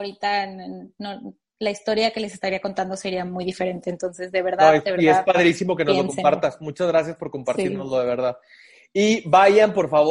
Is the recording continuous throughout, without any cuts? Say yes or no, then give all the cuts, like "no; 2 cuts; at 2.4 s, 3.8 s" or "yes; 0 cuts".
yes; 0 cuts